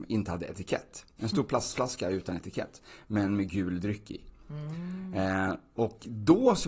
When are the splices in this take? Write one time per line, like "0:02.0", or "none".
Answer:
none